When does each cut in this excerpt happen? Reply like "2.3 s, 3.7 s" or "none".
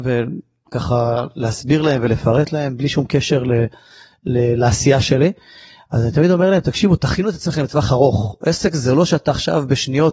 none